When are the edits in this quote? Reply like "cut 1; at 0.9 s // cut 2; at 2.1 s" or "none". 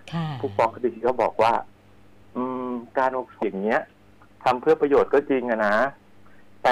cut 1; at 3.4 s